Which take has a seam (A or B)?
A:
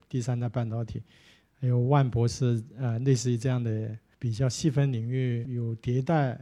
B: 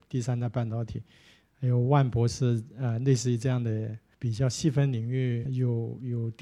A